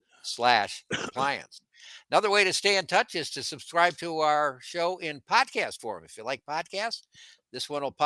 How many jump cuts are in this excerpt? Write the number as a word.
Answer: zero